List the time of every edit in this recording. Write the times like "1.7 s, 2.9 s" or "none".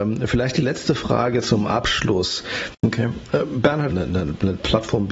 2.8 s, 3.9 s